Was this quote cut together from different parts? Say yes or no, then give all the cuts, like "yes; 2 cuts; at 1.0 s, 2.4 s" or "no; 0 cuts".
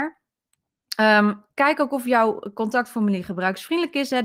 no; 0 cuts